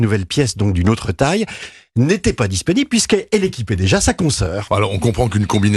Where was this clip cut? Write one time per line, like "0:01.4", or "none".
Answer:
0:04.7

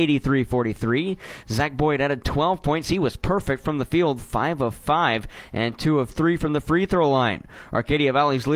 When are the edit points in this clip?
0:01.4

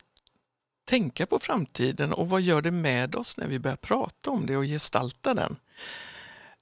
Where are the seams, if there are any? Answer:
none

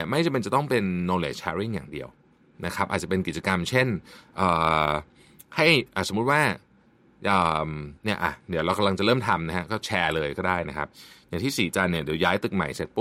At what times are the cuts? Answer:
none

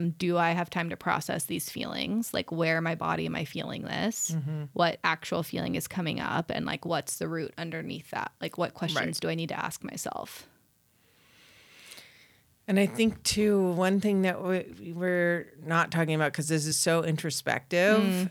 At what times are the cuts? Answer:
none

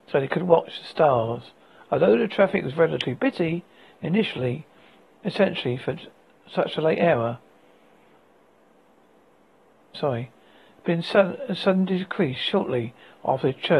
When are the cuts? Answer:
0:09.9

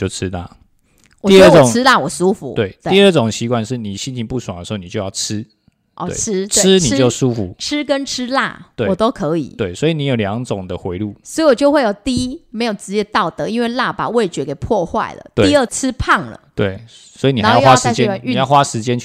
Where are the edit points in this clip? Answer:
0:15.7

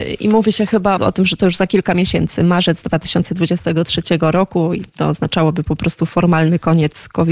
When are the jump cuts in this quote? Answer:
0:01.0

